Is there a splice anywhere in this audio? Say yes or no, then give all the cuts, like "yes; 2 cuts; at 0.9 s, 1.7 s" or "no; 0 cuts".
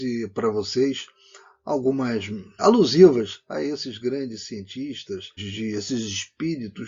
yes; 2 cuts; at 2.6 s, 5.4 s